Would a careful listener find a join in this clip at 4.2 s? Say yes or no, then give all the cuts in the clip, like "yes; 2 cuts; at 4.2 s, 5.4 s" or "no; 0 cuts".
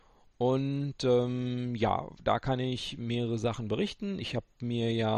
no; 0 cuts